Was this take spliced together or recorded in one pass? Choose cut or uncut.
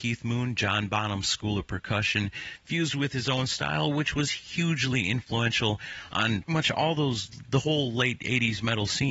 cut